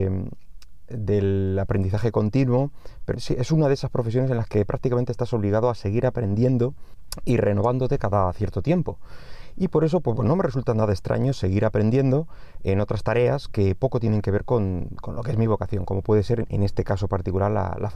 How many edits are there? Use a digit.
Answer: 2